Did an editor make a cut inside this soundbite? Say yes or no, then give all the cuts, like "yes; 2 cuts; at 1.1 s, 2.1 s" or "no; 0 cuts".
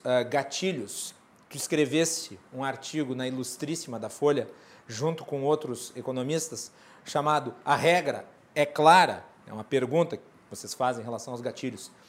no; 0 cuts